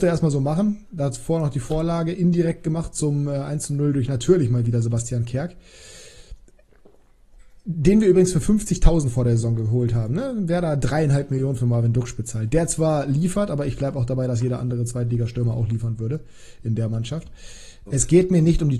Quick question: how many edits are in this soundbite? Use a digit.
1